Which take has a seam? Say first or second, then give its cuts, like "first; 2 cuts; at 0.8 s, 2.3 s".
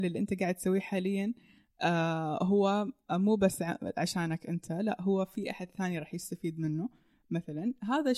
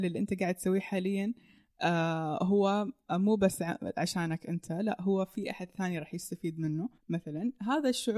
second; 1 cut; at 7.0 s